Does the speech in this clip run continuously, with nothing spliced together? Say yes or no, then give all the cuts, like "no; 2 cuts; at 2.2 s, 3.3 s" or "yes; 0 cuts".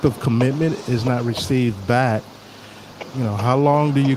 no; 1 cut; at 3.1 s